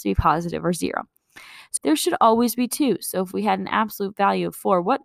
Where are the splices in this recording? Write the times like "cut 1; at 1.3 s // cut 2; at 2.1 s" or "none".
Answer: cut 1; at 1.8 s

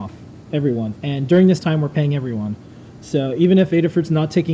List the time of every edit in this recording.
cut 1; at 0.9 s

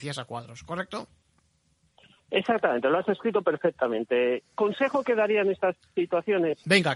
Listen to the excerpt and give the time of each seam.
none

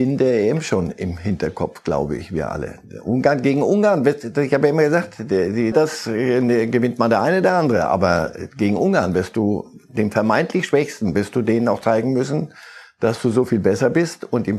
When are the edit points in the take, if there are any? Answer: cut 1; at 5.7 s

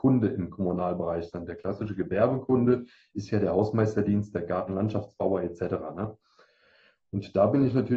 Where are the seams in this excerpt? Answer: none

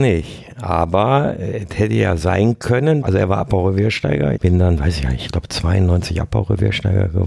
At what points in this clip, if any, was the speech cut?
cut 1; at 3.0 s // cut 2; at 4.4 s

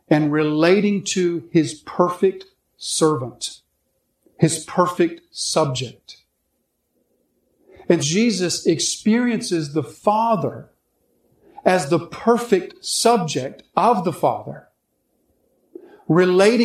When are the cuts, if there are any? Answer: cut 1; at 8.0 s

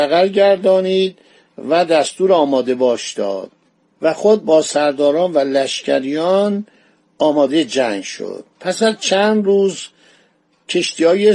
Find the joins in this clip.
none

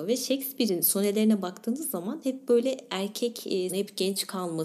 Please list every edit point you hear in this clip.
cut 1; at 3.7 s

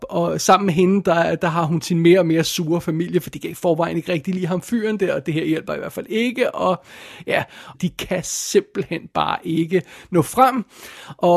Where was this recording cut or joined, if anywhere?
cut 1; at 1.8 s // cut 2; at 7.7 s

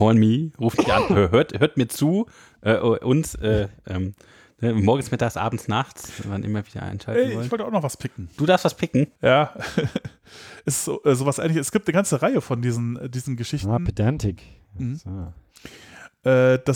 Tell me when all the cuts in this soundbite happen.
cut 1; at 9.2 s

